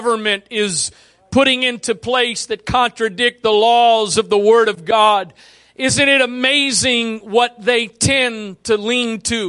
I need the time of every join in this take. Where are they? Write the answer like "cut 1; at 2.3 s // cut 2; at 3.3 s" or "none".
none